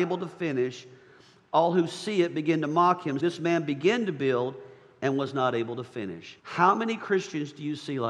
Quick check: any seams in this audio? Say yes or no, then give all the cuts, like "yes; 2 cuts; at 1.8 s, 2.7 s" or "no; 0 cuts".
yes; 2 cuts; at 3.2 s, 6.4 s